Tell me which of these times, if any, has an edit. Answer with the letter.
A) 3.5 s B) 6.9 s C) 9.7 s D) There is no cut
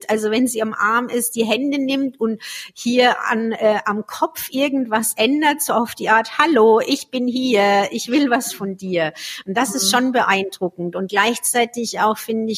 D